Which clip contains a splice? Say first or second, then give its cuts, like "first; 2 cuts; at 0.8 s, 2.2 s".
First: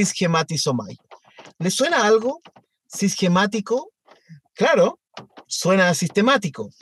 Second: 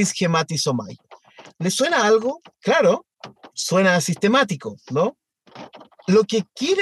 second; 1 cut; at 2.5 s